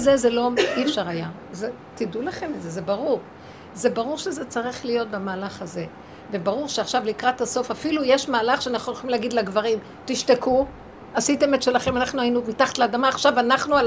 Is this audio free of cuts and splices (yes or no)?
yes